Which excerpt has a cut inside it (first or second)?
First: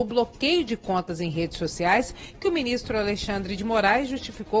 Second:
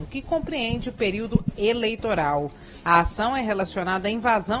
second